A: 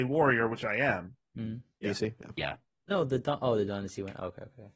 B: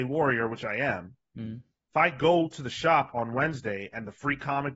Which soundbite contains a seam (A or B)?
A